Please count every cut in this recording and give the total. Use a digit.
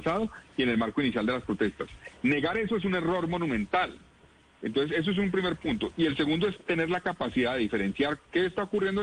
0